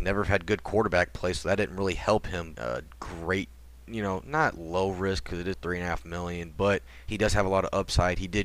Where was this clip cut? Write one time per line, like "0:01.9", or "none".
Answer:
0:02.5
0:05.5